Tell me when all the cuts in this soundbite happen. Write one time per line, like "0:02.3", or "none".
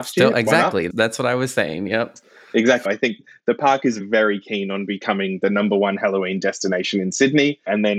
0:00.9
0:02.9